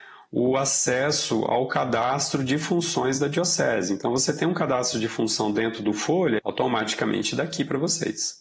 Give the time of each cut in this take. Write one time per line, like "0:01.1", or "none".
0:06.4

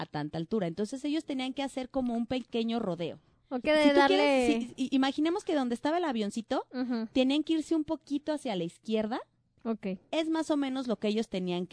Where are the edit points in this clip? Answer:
0:03.6
0:09.6

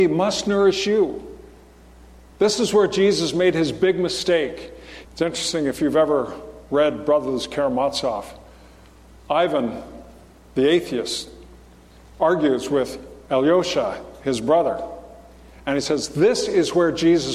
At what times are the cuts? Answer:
0:02.3
0:05.0

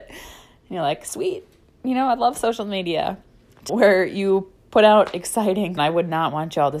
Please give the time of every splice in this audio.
0:03.7
0:05.8

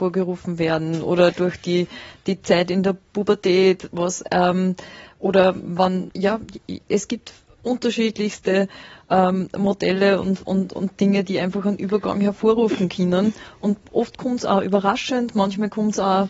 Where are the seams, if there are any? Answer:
0:06.1

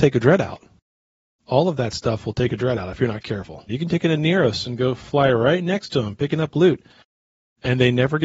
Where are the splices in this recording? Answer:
0:03.7

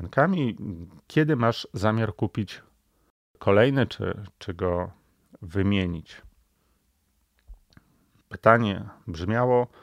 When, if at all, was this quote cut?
0:01.1
0:08.2

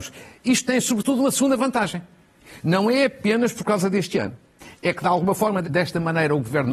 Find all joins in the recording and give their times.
0:05.6

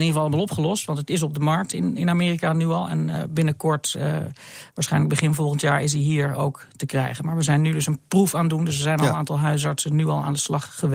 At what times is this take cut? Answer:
none

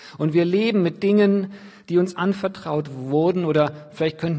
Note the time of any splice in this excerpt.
none

